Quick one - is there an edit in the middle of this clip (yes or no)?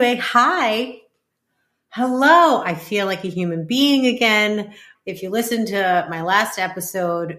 yes